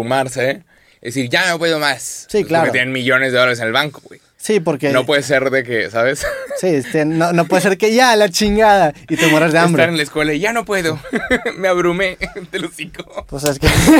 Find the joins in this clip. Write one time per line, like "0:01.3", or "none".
0:06.8